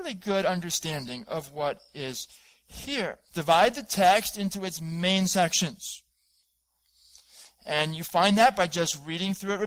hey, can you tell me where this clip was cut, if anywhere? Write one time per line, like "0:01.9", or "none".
0:03.3